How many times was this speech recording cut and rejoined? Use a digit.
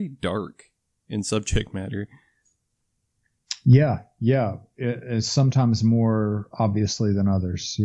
0